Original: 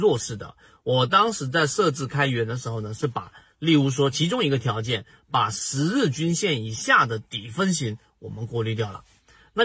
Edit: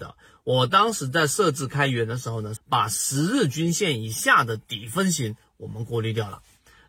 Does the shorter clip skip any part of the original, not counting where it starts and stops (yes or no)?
yes